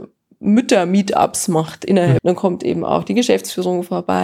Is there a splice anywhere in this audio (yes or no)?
yes